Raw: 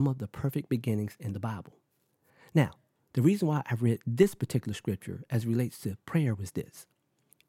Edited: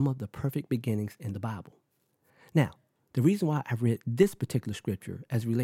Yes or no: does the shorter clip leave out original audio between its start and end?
no